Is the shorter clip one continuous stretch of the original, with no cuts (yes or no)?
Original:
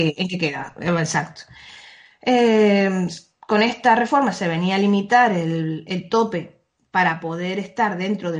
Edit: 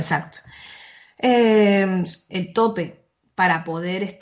no